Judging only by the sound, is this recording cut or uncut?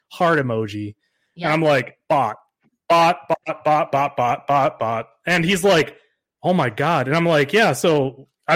uncut